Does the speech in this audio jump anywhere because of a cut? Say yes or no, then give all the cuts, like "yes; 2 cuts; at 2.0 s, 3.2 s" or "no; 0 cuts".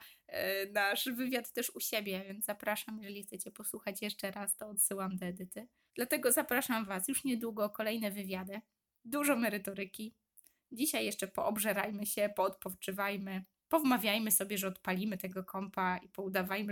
yes; 1 cut; at 5.9 s